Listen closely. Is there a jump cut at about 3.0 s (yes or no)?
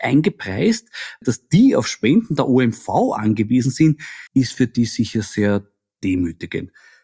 no